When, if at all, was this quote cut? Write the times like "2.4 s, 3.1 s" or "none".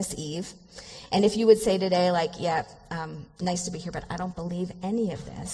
none